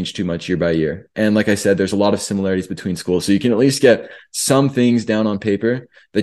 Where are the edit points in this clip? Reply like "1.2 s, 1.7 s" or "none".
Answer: none